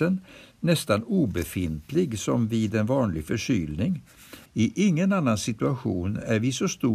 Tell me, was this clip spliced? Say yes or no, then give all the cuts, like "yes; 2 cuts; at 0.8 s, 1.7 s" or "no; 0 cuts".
yes; 1 cut; at 4.5 s